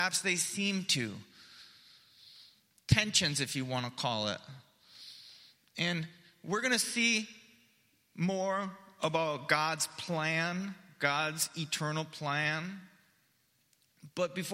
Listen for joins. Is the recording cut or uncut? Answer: uncut